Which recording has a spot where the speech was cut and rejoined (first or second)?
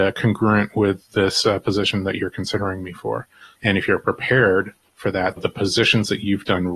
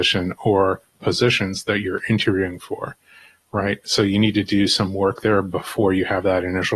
first